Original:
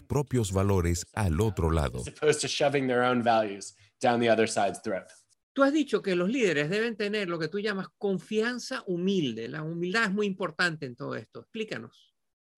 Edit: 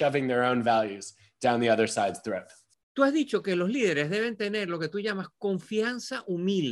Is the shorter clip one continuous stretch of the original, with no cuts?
yes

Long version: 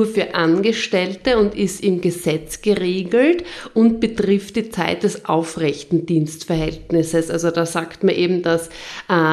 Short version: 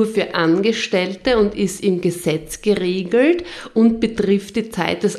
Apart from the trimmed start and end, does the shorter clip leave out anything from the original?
no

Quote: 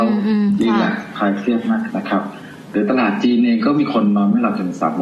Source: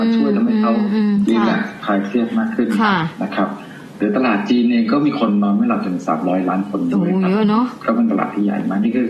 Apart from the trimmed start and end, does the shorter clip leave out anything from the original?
yes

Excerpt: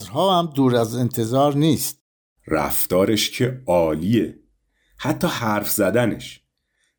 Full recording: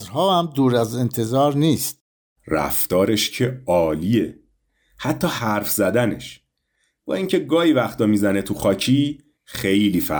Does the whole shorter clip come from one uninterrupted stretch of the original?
yes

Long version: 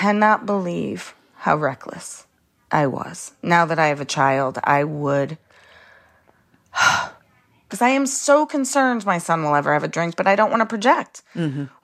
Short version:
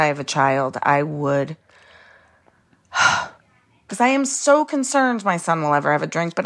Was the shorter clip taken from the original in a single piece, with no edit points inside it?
yes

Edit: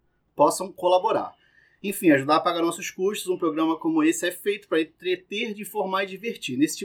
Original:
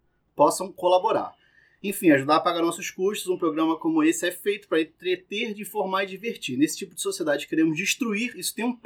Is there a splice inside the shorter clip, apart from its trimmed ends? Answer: no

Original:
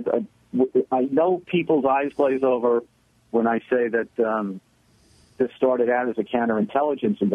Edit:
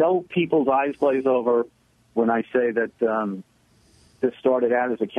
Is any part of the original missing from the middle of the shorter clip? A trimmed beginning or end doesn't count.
no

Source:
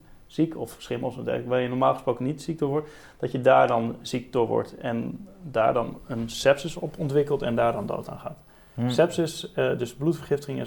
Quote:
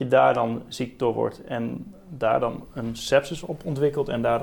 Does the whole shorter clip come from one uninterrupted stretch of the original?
yes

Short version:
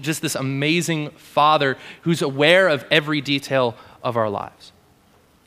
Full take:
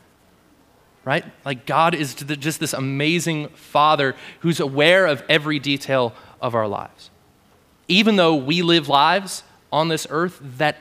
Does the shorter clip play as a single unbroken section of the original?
yes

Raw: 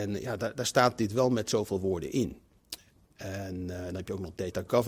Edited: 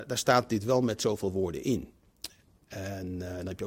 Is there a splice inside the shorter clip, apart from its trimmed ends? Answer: no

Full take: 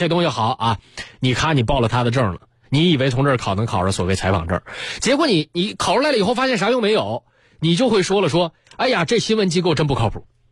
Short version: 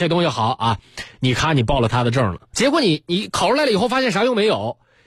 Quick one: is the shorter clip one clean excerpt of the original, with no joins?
no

